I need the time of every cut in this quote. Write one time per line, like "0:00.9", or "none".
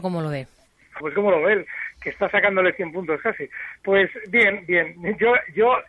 0:01.0

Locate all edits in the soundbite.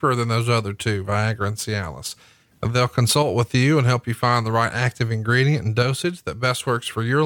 0:02.5

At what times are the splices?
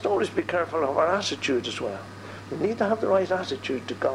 none

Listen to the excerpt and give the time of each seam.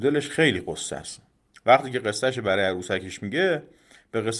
0:01.5

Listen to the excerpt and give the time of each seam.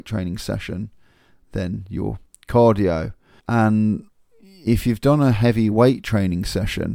0:03.4

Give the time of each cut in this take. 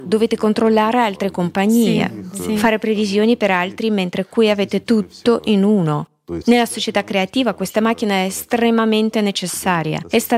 0:06.4

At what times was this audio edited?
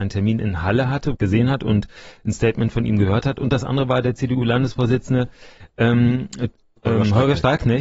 0:01.1
0:06.8

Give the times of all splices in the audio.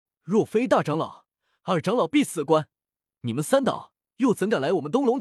none

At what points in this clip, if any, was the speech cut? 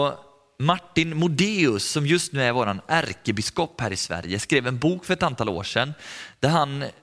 none

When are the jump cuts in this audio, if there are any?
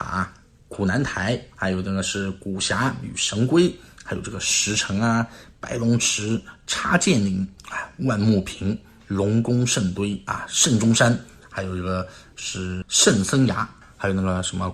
none

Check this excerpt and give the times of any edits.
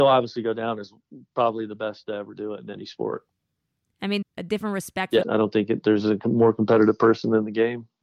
0:04.2
0:05.2

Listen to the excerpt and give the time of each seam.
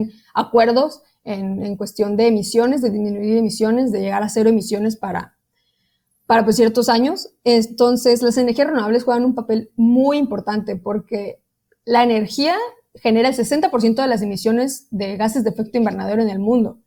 none

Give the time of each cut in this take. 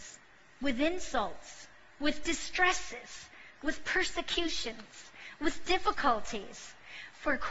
none

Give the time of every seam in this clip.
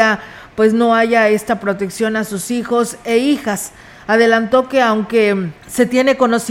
0:05.6

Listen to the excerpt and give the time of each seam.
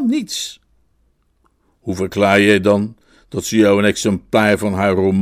none

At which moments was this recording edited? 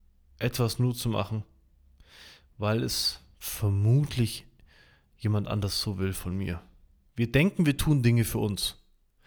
0:07.1

